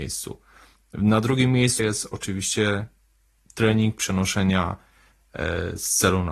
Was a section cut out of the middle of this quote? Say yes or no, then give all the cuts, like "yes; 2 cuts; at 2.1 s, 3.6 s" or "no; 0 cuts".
yes; 1 cut; at 1.8 s